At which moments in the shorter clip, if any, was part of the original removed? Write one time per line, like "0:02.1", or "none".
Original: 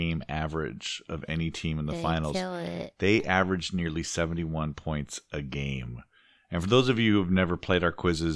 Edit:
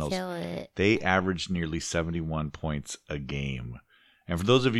none